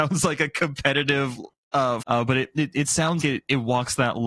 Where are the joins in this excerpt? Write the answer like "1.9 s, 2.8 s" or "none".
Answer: 2.0 s, 3.2 s

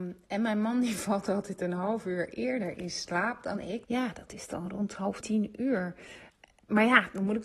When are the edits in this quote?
3.8 s, 5.2 s

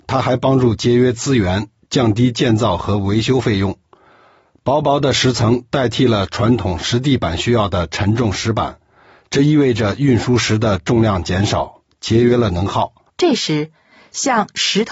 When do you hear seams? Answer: 13.1 s

